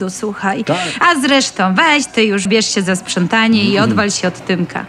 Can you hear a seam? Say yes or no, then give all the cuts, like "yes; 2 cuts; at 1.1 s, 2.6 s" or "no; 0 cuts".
yes; 1 cut; at 2.5 s